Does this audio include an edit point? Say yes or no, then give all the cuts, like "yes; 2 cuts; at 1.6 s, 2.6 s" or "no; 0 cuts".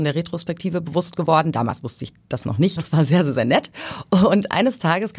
yes; 1 cut; at 2.8 s